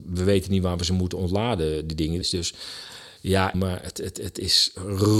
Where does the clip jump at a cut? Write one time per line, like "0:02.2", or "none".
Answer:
0:02.2
0:03.5